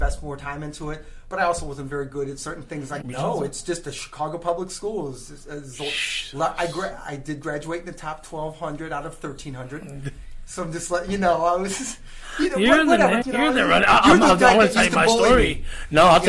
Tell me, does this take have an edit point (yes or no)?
yes